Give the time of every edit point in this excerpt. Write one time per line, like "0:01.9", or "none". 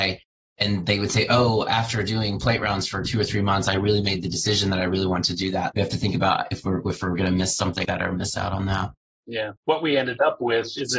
0:05.7
0:07.8
0:09.6